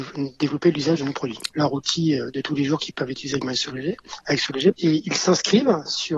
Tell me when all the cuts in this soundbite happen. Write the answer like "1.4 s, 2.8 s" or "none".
1.5 s, 4.7 s

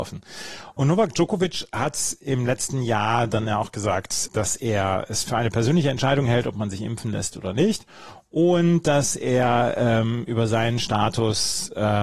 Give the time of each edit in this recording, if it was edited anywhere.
4.3 s

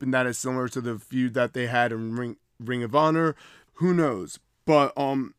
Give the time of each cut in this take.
3.7 s

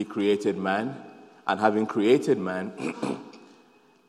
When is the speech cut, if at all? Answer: none

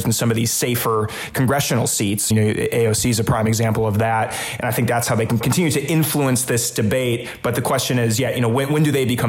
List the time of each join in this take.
2.3 s, 5.4 s

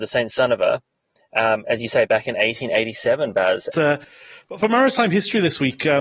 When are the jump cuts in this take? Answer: 3.7 s

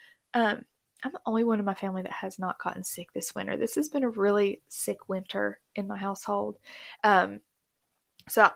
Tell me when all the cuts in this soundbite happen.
7.0 s

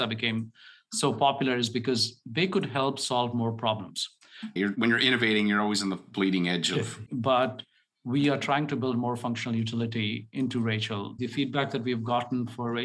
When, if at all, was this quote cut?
4.6 s, 7.1 s, 11.2 s

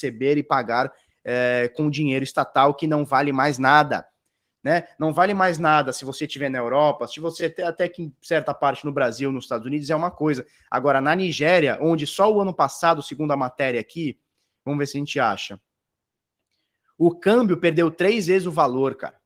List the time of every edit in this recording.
none

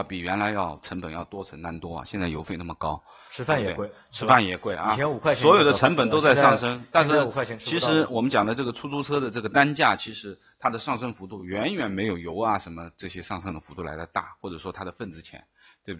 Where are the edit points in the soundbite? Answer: none

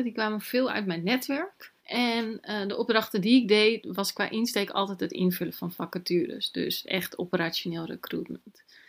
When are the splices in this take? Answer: 1.8 s

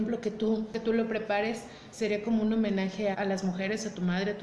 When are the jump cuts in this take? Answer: 3.1 s

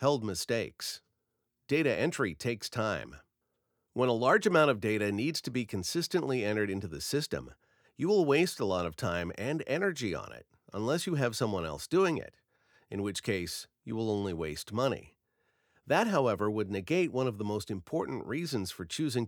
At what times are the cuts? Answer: 1.5 s

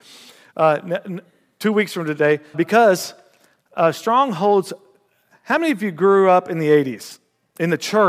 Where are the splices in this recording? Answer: 2.5 s

